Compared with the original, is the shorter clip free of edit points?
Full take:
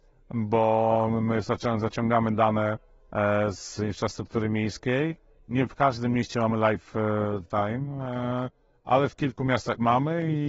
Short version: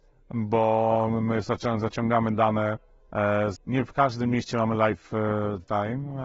no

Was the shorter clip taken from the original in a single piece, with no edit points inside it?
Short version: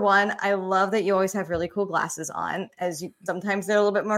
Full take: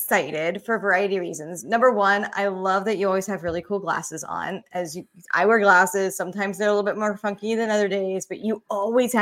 no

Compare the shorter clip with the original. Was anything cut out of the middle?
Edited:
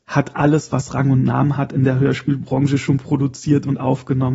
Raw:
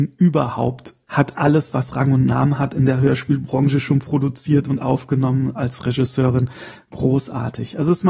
no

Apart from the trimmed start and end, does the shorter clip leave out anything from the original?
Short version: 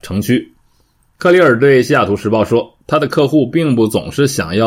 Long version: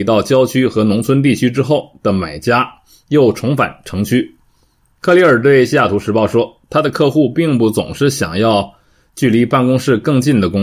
no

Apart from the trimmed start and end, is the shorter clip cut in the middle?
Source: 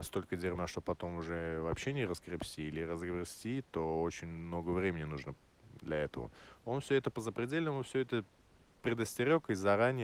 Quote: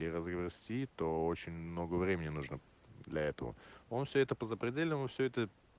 no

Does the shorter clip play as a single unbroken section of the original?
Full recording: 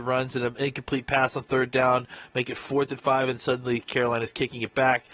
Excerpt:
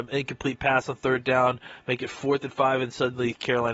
yes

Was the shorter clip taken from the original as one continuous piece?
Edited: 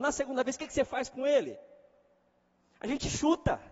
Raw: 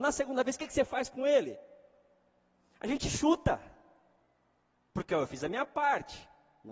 yes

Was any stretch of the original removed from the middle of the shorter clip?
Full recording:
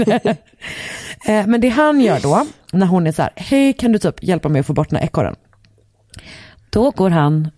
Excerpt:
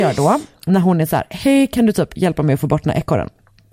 no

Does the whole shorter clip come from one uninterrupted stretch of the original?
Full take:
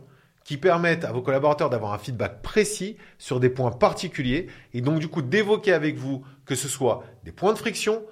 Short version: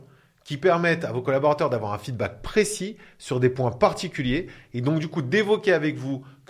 yes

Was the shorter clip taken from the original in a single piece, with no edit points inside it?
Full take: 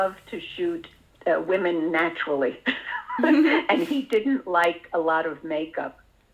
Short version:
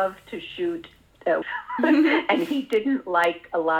no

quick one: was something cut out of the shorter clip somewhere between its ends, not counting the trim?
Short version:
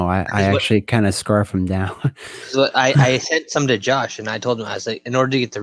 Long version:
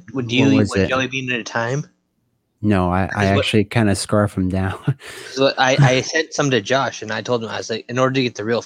no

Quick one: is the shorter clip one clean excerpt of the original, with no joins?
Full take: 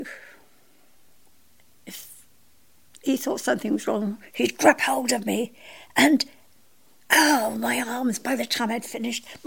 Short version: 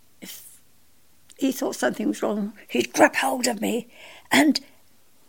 yes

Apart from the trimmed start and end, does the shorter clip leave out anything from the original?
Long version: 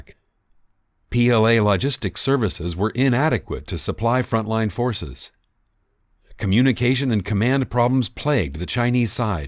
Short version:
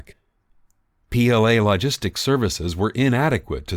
no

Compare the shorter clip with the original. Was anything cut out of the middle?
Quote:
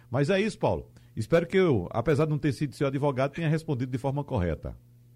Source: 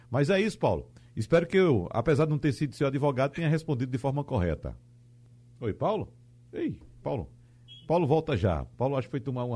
no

